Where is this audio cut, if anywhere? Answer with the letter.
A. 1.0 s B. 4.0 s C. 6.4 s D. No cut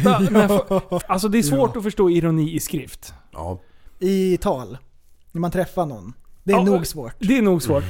A